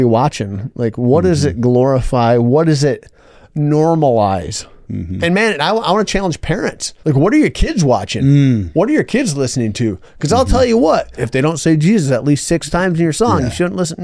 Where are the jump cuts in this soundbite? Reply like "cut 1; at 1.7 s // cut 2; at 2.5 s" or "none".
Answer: cut 1; at 7.0 s // cut 2; at 11.2 s